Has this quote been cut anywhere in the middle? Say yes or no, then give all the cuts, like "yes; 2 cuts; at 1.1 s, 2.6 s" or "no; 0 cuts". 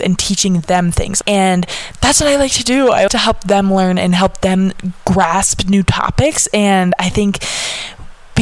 yes; 2 cuts; at 1.2 s, 3.1 s